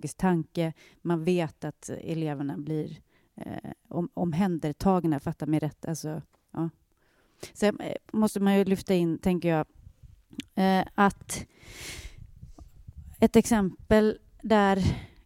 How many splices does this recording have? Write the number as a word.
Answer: zero